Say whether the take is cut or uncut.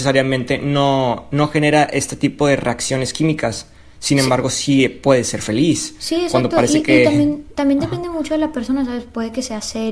uncut